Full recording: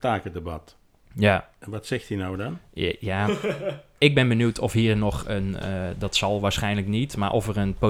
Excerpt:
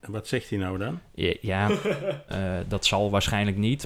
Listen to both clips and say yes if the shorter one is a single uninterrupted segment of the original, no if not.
no